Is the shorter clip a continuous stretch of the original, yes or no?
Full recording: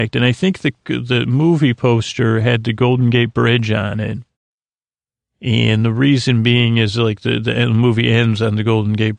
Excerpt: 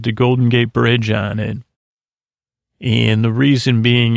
yes